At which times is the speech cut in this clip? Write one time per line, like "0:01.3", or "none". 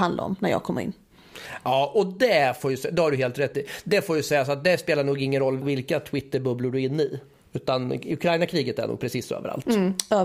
0:05.6